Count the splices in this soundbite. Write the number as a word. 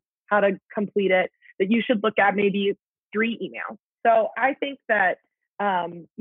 one